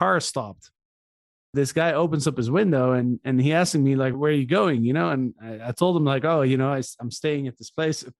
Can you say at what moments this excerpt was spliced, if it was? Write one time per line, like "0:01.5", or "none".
none